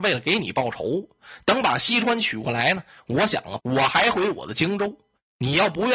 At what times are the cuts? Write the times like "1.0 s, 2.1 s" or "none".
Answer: 3.6 s